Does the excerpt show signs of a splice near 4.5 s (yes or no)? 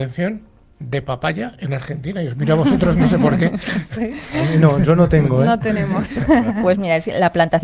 no